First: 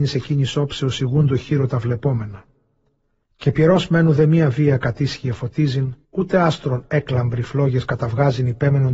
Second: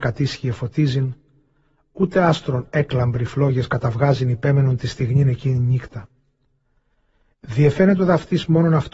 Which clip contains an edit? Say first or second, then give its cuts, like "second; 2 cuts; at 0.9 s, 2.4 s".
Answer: first; 2 cuts; at 3.2 s, 6.0 s